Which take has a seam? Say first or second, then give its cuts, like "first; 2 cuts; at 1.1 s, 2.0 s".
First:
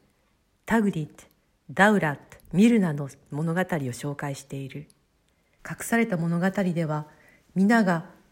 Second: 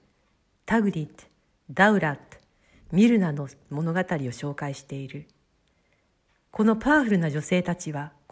first; 2 cuts; at 2.4 s, 5.6 s